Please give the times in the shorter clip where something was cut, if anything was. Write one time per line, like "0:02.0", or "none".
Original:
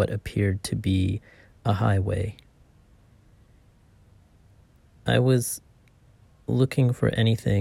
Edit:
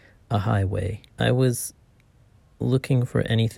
0:01.1